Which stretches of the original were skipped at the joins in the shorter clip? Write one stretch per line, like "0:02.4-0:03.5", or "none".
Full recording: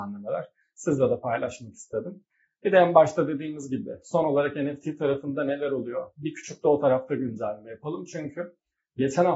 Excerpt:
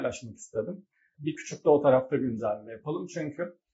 0:02.5-0:06.1